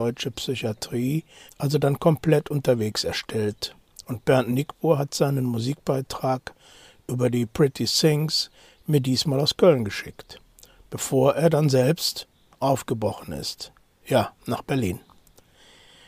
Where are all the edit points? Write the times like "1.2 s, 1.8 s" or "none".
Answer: 1.5 s